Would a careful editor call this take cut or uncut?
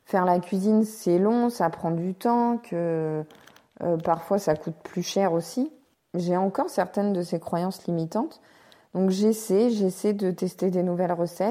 uncut